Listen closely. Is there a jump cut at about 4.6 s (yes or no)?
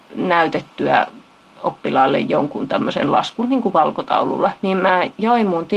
yes